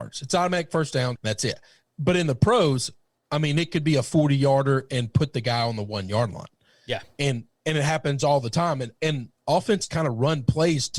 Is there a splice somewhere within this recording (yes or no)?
yes